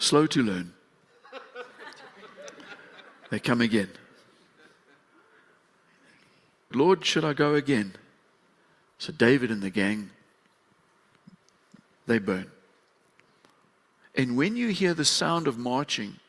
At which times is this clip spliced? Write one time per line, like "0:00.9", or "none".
0:06.7
0:08.8
0:14.0